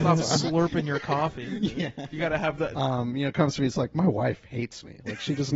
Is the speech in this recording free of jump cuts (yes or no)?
no